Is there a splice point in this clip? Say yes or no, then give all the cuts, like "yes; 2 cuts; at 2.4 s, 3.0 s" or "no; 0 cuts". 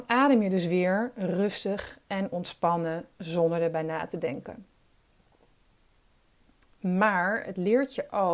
no; 0 cuts